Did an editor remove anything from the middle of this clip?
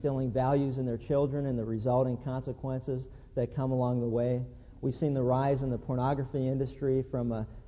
no; 0 cuts

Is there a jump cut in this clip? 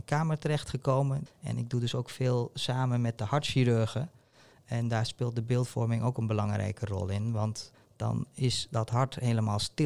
yes; 1 cut; at 1.3 s

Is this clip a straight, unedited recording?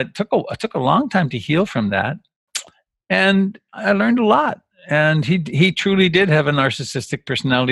yes; 0 cuts

